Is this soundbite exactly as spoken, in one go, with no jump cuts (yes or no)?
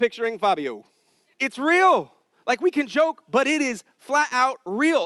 no